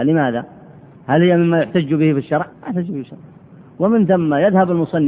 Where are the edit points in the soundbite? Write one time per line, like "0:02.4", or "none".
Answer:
0:01.0
0:02.5